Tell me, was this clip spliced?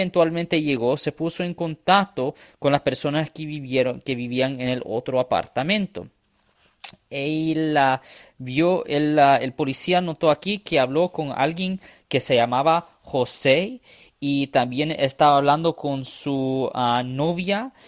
no; 0 cuts

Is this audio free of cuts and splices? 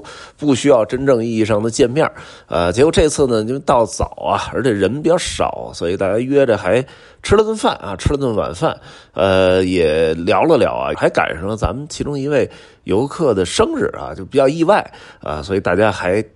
no; 1 cut; at 10.9 s

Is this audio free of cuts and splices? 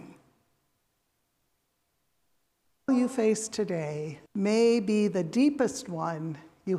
no; 2 cuts; at 2.9 s, 4.3 s

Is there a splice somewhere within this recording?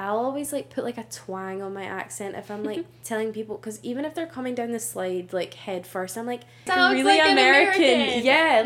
yes; 1 cut; at 6.7 s

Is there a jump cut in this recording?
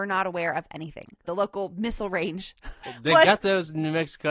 yes; 2 cuts; at 1.2 s, 2.8 s

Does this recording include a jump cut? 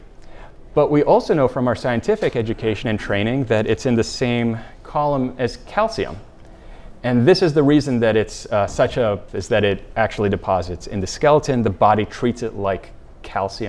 yes; 1 cut; at 9.3 s

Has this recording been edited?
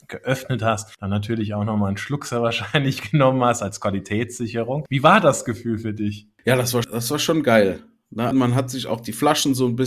yes; 2 cuts; at 6.8 s, 8.3 s

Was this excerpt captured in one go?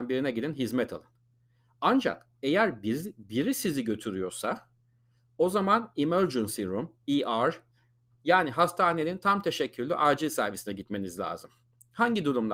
yes; 0 cuts

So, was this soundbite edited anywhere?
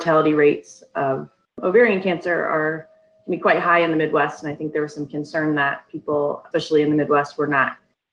no; 0 cuts

